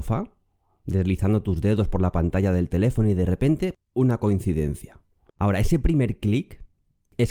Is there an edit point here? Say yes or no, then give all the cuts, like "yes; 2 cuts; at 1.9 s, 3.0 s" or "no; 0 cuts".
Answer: yes; 2 cuts; at 3.7 s, 5.3 s